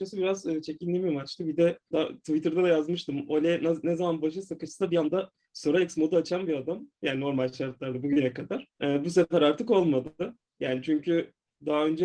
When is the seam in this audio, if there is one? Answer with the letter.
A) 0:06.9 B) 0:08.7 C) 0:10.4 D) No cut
B